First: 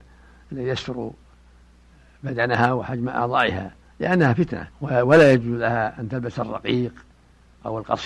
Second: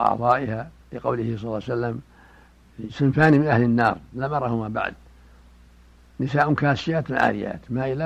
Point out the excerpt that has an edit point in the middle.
first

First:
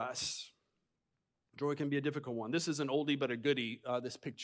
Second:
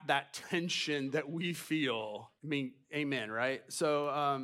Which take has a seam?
second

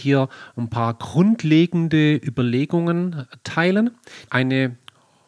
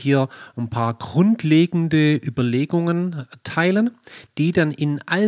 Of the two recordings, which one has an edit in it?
first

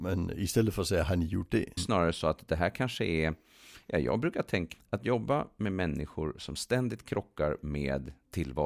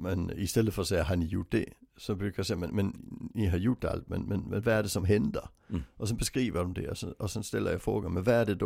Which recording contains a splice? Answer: first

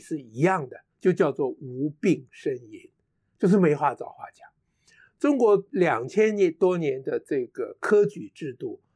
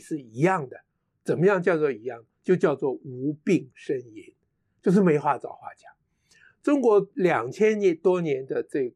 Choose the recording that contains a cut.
first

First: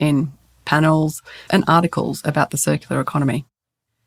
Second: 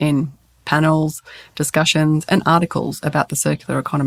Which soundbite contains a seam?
first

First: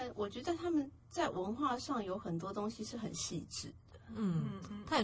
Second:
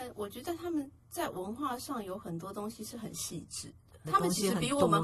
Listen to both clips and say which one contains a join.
second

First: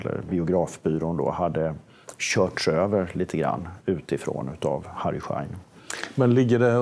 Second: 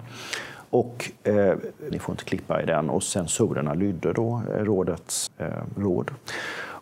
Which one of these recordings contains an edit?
second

